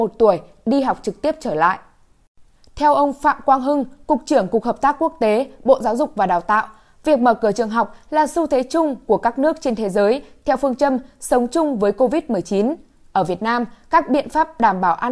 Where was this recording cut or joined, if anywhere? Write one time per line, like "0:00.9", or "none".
none